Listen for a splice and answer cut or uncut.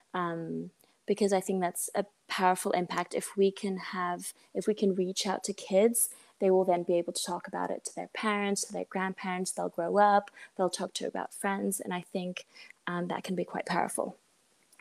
uncut